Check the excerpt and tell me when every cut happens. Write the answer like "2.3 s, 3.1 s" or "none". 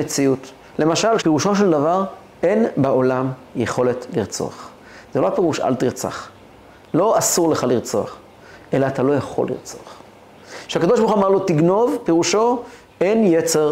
1.2 s